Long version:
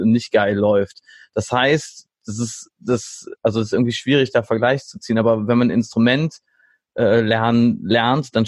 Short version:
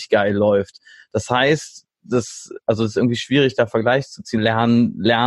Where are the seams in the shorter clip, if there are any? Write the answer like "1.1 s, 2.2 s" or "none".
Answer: 2.0 s, 4.4 s

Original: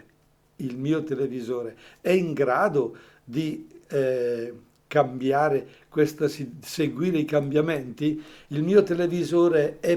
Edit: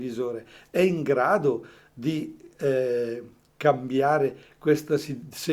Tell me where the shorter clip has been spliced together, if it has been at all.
none

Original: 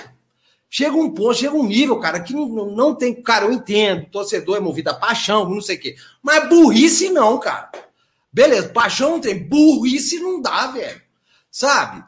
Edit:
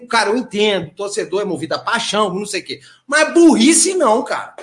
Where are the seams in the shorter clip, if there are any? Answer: none

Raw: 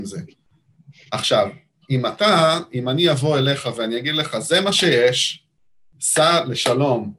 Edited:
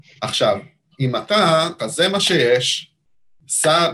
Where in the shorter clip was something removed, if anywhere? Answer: 1.8 s

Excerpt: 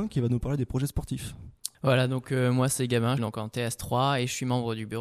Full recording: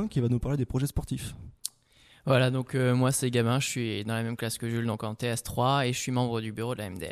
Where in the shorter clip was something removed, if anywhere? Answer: 1.7 s, 3.2 s

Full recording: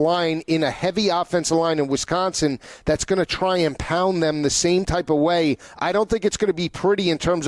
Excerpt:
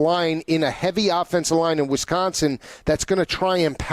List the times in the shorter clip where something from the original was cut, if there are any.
none

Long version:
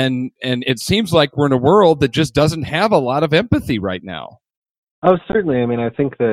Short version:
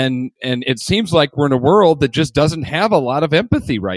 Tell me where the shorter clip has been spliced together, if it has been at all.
none

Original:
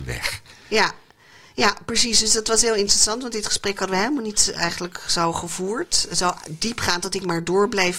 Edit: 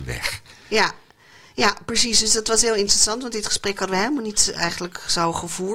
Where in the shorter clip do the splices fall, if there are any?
none

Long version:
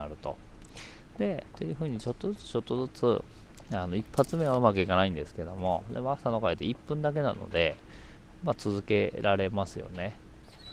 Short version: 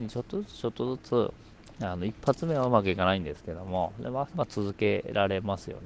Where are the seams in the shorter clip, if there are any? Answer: 4.3 s

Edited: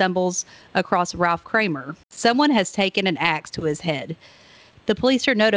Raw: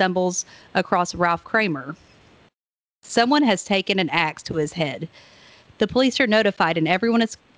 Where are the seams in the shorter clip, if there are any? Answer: 2.0 s

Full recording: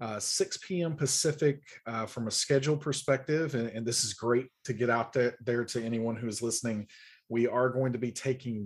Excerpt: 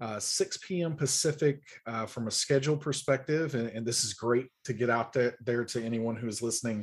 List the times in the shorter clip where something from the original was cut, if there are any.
none

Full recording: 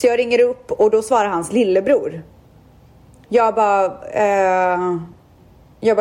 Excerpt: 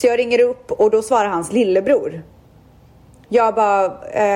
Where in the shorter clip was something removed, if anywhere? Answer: none

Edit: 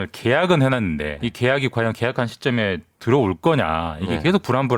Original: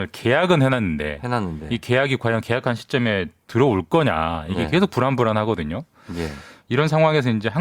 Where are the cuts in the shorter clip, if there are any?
1.2 s

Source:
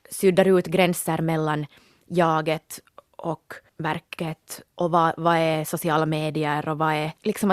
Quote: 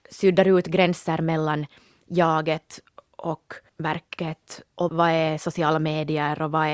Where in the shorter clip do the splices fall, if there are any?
4.9 s

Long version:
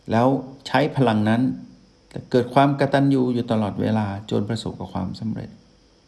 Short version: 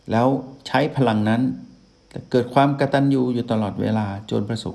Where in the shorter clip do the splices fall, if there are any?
none

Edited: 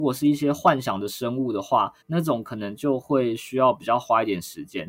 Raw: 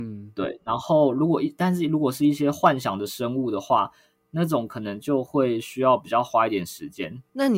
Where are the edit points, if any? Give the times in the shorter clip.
2.0 s

